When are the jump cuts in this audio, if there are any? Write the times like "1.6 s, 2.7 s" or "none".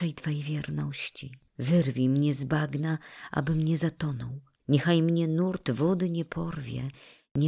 1.5 s, 4.6 s